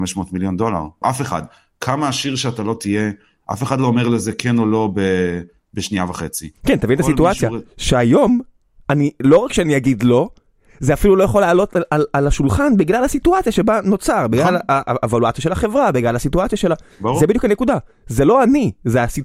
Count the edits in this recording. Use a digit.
1